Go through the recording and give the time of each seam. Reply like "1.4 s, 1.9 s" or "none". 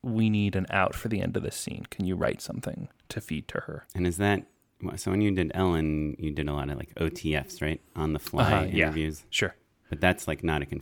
3.9 s